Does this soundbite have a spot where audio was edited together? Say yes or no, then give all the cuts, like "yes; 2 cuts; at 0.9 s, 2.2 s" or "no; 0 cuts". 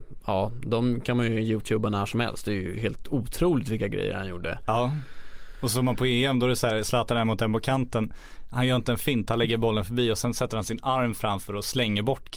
no; 0 cuts